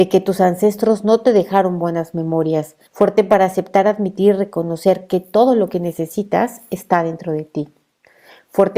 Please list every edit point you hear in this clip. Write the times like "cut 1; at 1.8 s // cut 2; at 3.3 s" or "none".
cut 1; at 2.9 s